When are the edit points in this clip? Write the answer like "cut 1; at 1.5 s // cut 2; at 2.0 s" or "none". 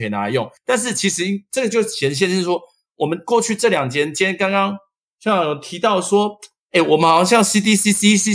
none